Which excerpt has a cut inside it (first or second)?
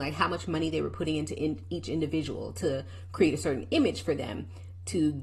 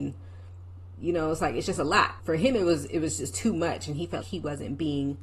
second